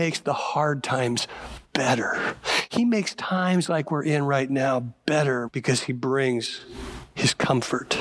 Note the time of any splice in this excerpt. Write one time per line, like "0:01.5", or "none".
0:05.5

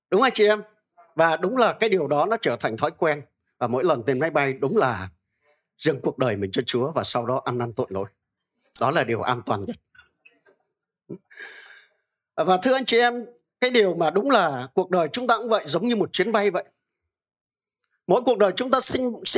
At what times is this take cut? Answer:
none

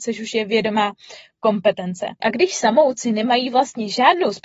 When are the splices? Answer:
0:02.2

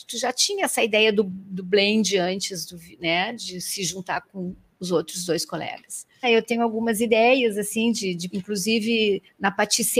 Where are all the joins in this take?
0:06.2
0:08.3

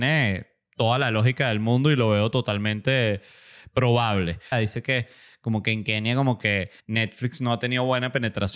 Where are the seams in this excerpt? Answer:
0:04.5
0:06.8

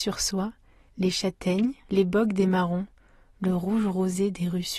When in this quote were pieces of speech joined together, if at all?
0:01.9

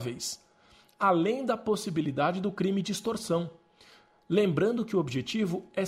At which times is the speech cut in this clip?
none

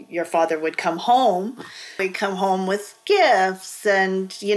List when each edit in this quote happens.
0:02.0

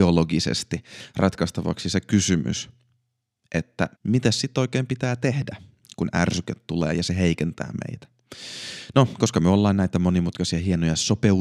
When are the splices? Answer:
0:03.9

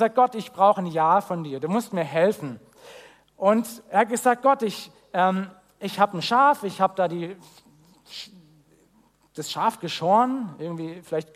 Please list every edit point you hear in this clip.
none

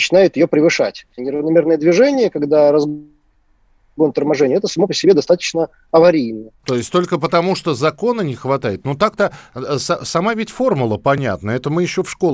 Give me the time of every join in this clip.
0:01.2
0:06.6

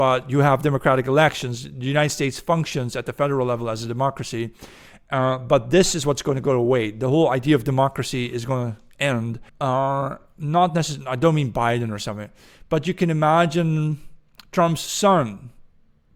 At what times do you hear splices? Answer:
0:09.5

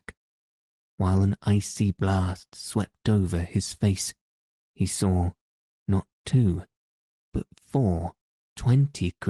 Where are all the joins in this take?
0:08.3

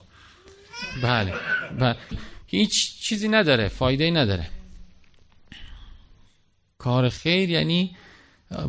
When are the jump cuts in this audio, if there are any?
0:02.1

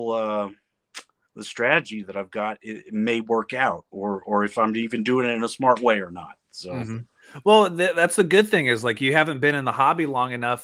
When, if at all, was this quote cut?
none

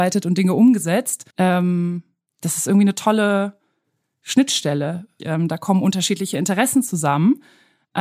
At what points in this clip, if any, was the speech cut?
0:01.3
0:05.2

